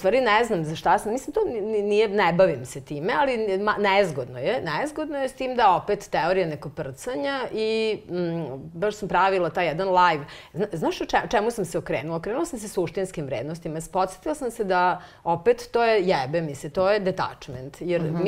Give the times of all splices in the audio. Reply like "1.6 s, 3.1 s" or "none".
16.7 s